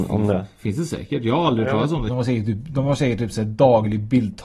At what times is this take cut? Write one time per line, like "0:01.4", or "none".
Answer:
0:02.1

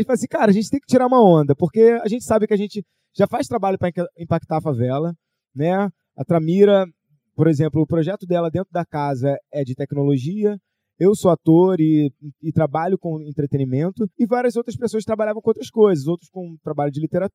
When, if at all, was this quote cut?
0:14.1

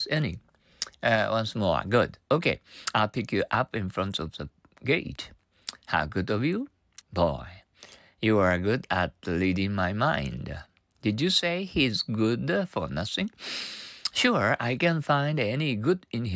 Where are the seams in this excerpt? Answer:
0:07.0

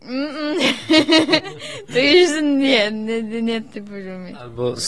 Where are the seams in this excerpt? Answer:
none

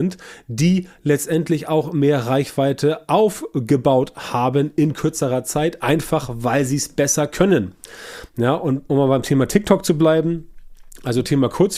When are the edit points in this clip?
none

